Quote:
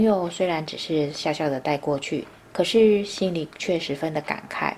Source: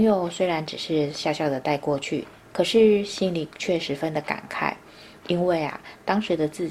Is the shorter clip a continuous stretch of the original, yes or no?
yes